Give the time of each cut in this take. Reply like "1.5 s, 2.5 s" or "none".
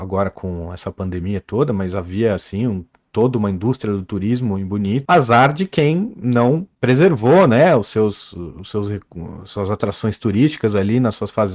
5.1 s

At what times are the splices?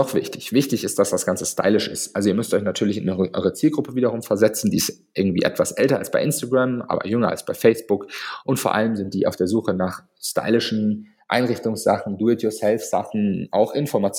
none

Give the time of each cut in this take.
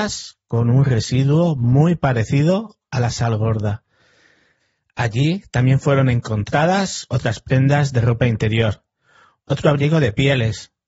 none

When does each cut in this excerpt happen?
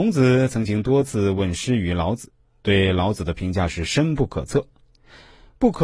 none

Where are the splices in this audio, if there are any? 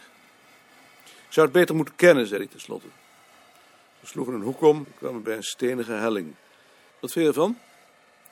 4.8 s, 6.9 s

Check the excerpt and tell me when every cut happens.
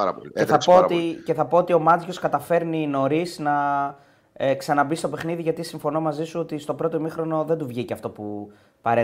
none

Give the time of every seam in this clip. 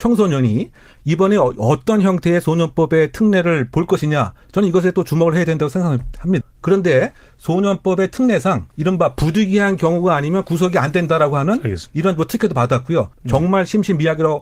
6.4 s, 8.7 s, 13.1 s

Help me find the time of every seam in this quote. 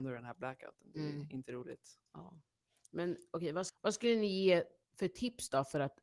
2.1 s, 3.7 s

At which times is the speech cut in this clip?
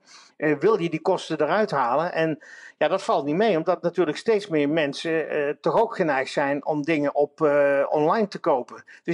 none

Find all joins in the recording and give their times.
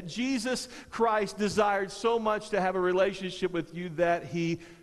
none

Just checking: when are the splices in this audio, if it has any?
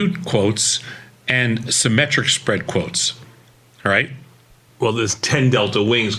4.7 s

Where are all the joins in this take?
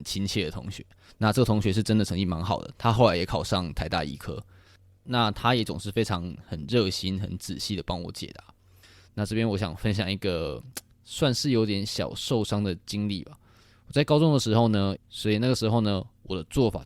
9.1 s, 15.0 s

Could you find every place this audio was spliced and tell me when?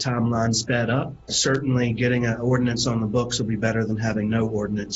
1.3 s

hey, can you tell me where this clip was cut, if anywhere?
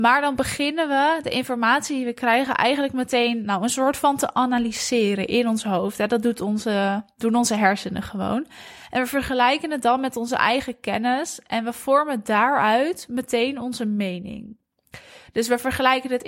none

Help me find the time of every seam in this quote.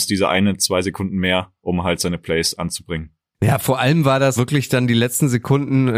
4.4 s

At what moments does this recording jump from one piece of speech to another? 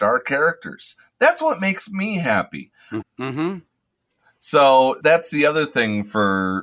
3.0 s, 5.0 s

